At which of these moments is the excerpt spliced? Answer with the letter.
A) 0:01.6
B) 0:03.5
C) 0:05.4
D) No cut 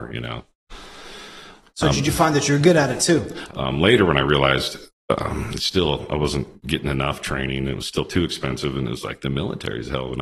B